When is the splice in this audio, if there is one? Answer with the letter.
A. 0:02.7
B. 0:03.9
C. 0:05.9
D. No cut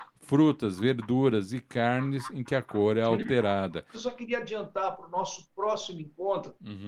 B